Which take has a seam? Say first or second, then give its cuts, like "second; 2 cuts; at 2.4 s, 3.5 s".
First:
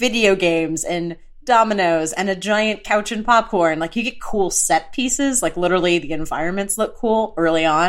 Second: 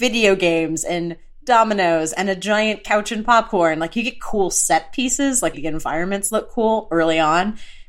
second; 1 cut; at 5.5 s